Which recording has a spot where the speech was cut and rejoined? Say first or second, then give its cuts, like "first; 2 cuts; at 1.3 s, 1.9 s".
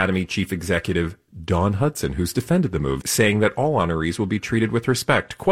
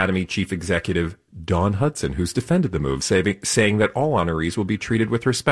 first; 1 cut; at 3.0 s